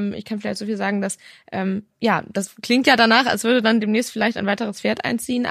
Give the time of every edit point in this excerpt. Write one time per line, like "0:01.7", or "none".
none